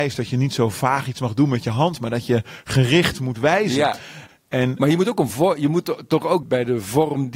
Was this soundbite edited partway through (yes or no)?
yes